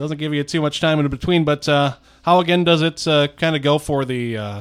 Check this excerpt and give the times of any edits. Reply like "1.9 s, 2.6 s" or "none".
none